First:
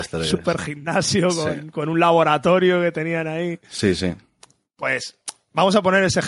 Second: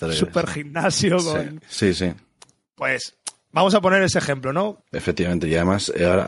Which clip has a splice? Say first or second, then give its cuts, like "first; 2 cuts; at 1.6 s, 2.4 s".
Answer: second; 2 cuts; at 1.6 s, 4.8 s